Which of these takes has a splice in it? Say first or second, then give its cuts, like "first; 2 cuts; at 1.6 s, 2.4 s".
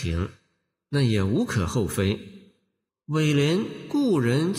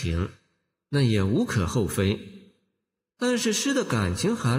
first; 1 cut; at 2.9 s